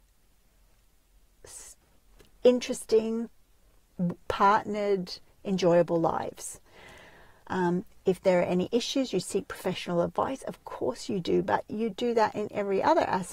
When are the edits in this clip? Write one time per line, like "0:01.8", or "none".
0:07.4